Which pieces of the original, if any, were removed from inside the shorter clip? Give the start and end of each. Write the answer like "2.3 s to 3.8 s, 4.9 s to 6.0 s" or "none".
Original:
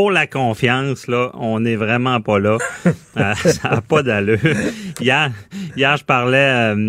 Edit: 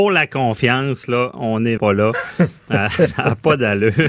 1.8 s to 2.2 s